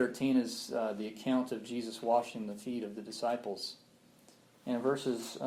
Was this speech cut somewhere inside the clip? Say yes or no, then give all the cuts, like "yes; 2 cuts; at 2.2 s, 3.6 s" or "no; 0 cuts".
no; 0 cuts